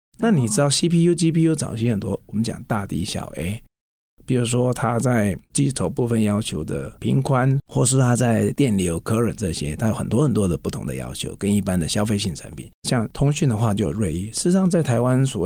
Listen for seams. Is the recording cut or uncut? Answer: cut